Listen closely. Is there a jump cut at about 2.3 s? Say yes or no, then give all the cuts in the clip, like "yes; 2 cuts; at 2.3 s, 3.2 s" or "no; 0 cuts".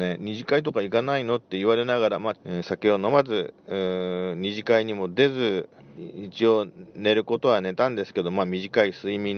yes; 2 cuts; at 2.3 s, 5.8 s